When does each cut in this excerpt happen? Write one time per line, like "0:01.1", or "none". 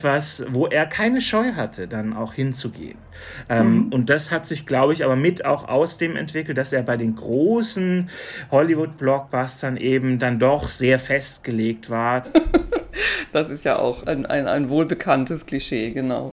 0:12.2
0:14.0